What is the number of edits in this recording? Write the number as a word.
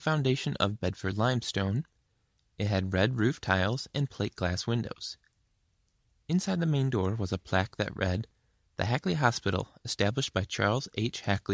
zero